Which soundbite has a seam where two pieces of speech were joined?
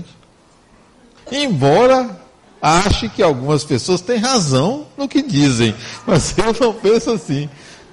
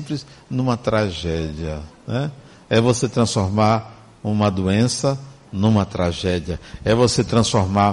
first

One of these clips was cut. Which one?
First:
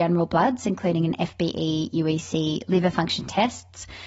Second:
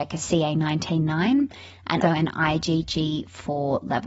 second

